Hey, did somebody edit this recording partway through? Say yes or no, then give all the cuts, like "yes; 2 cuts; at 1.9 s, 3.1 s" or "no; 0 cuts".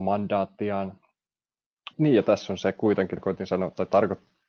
yes; 2 cuts; at 1.9 s, 3.2 s